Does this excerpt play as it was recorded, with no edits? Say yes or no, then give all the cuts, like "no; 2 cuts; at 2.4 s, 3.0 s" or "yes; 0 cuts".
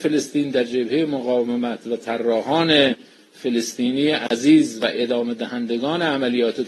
yes; 0 cuts